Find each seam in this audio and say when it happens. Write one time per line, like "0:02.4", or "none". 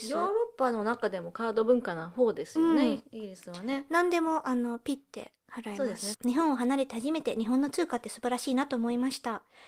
0:06.1